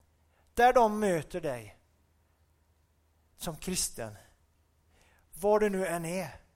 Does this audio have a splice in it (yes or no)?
no